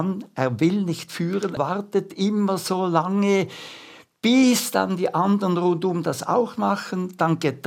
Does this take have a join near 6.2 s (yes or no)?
no